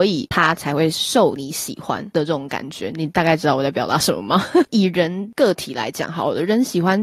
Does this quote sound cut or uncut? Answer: cut